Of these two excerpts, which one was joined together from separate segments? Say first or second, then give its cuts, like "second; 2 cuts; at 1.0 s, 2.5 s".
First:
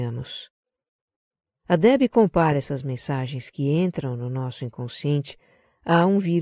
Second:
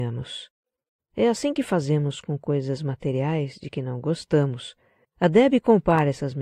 second; 2 cuts; at 1.0 s, 5.0 s